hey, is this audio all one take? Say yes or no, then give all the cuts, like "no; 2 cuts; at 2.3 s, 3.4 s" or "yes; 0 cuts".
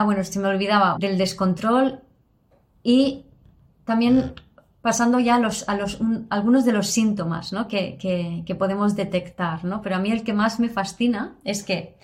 no; 1 cut; at 1.0 s